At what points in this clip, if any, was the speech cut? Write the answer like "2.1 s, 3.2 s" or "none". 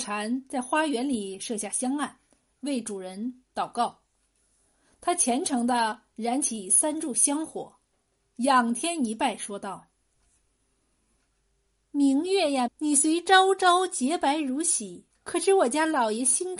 12.7 s, 15.1 s